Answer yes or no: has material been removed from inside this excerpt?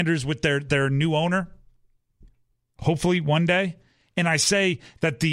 no